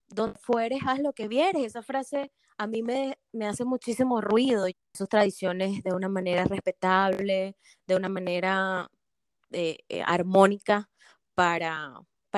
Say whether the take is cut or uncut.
cut